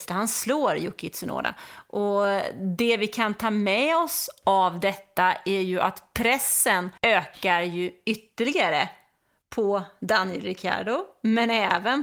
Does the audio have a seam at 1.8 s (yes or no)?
no